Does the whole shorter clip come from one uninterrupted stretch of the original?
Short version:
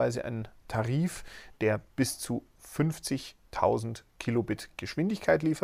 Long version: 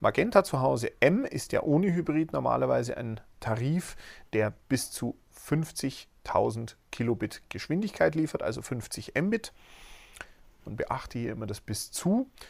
yes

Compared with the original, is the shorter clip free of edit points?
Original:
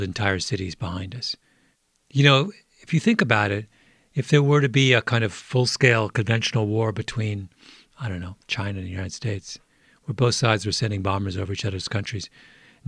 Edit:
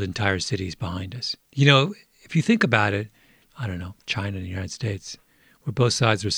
no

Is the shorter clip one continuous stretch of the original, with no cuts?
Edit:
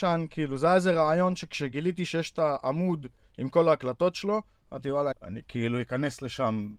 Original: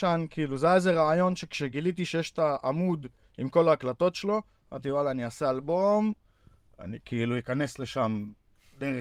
no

